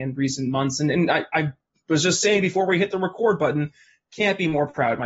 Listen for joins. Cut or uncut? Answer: uncut